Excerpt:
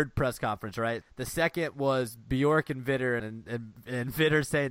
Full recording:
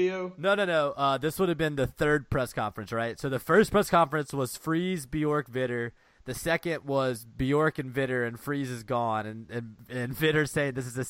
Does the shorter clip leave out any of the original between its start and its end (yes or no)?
yes